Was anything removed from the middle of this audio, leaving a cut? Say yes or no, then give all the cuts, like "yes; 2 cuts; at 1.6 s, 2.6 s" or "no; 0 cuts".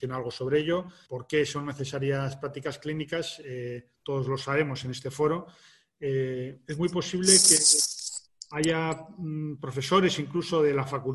yes; 1 cut; at 1.1 s